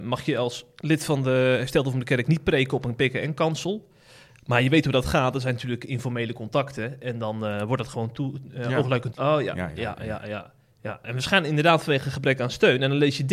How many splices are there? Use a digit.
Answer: 1